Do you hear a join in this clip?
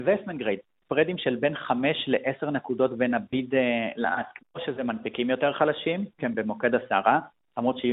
yes; 2 cuts; at 4.4 s, 6.2 s

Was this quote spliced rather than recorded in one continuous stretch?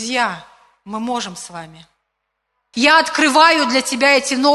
yes; 1 cut; at 2.7 s

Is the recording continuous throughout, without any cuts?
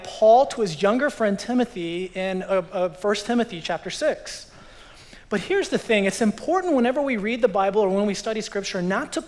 yes; 0 cuts

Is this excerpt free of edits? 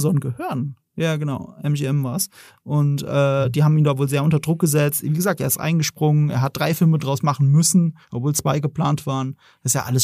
yes; 0 cuts

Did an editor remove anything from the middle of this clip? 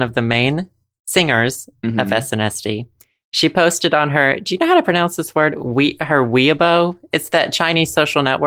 no; 0 cuts

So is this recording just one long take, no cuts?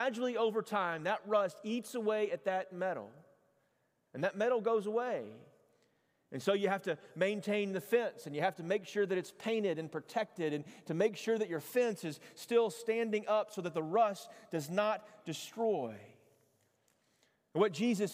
yes; 0 cuts

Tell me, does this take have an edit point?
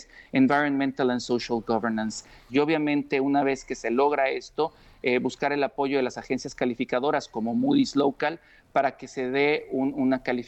yes; 1 cut; at 2.5 s

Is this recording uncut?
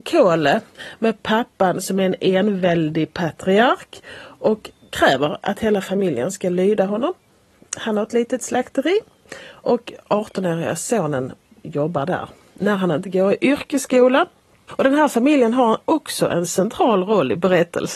no; 1 cut; at 14.7 s

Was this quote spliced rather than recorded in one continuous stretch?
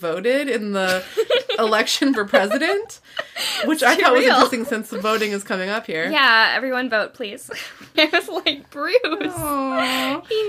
yes; 1 cut; at 7.9 s

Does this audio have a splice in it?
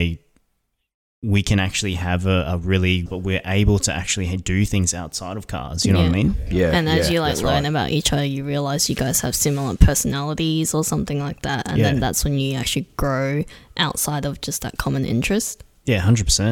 yes; 1 cut; at 3.1 s

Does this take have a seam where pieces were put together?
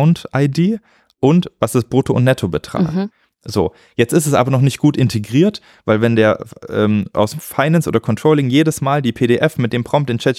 no; 0 cuts

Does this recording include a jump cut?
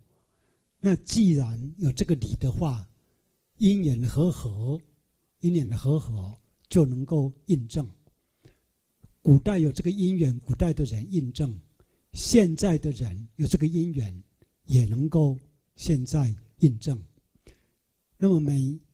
no; 0 cuts

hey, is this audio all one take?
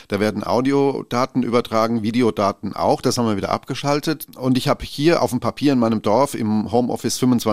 no; 1 cut; at 4.3 s

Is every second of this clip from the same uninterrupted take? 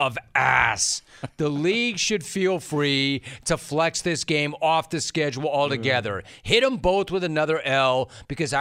yes; 0 cuts

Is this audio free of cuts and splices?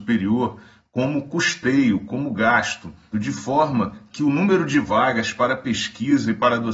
no; 1 cut; at 3.1 s

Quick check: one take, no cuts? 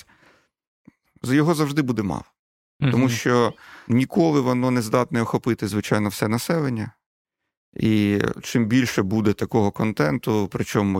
no; 1 cut; at 1.1 s

